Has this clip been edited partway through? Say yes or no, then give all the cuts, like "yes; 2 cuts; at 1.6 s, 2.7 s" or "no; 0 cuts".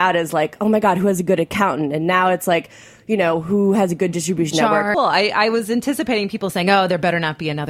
yes; 1 cut; at 4.9 s